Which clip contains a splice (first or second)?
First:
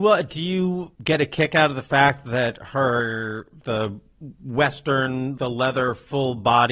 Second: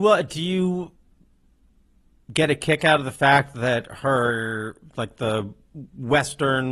first